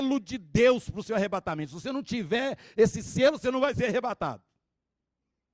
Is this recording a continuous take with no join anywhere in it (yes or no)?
yes